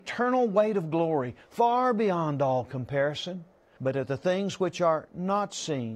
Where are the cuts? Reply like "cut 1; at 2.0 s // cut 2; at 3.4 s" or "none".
cut 1; at 3.8 s

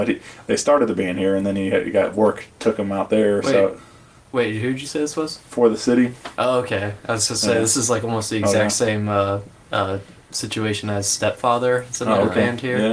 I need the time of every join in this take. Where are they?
none

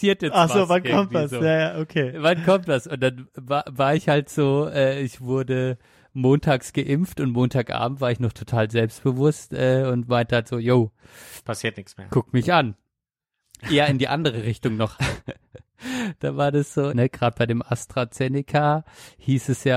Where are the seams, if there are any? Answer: cut 1; at 14.9 s // cut 2; at 16.9 s

